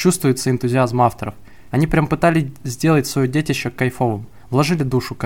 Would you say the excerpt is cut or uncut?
cut